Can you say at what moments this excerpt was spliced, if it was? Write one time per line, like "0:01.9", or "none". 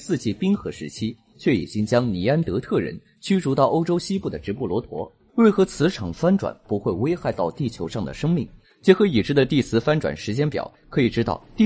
0:01.3
0:05.3
0:08.6